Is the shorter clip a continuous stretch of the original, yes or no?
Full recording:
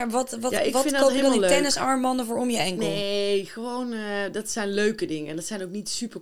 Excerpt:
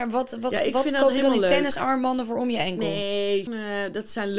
no